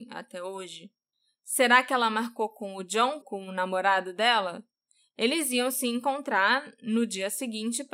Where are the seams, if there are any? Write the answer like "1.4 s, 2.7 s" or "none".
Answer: 3.2 s